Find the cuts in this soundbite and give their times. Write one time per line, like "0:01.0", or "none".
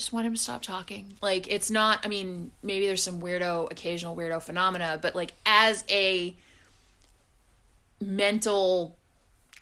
0:01.2